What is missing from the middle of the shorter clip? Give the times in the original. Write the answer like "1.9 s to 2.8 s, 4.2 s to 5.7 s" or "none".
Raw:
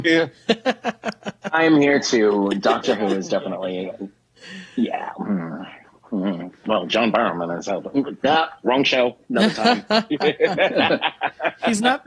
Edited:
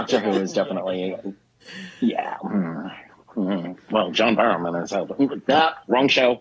none

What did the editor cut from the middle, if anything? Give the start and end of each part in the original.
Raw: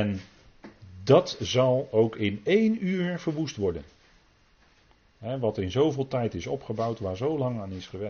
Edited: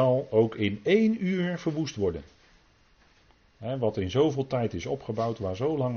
none

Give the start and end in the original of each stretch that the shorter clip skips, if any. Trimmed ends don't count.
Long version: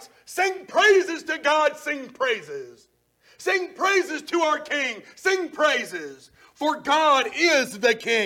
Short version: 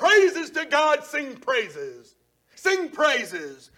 3.3 s to 5.1 s

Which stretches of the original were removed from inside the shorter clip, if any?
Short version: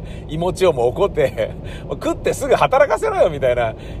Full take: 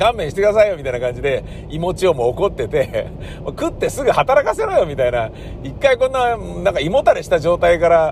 2.5 s to 2.7 s

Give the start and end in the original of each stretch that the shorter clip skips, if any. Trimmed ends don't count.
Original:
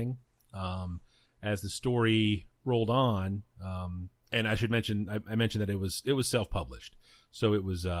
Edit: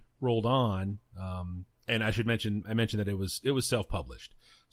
5.1 s to 5.2 s

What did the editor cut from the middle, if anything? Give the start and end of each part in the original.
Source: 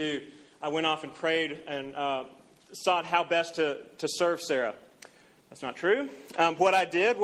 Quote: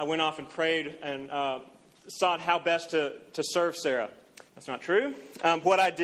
5.1 s to 5.4 s

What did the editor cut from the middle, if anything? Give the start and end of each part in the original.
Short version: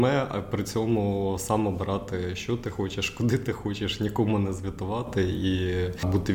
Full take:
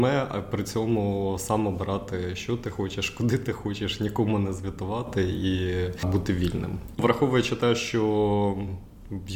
none

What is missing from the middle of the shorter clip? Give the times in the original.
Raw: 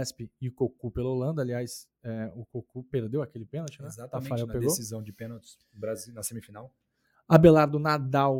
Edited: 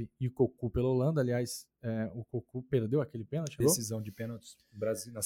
3.8 s to 4.6 s

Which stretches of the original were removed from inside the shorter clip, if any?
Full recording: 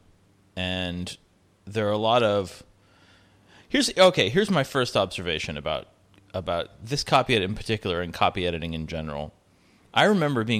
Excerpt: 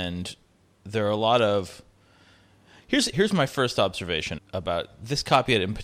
3.9 s to 4.3 s, 5.5 s to 6.2 s

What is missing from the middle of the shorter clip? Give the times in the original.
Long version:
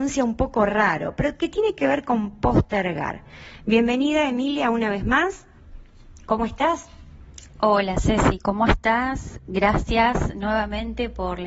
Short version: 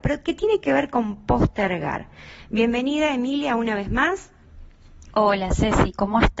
6.2 s to 7.6 s

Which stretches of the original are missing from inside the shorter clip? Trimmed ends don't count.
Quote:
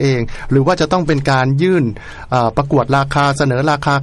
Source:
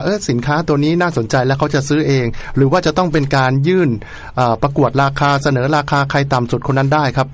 none

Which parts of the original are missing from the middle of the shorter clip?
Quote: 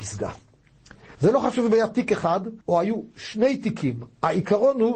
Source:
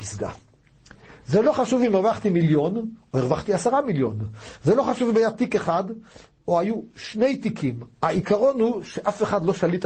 1.2 s to 4.6 s, 6.0 s to 6.4 s

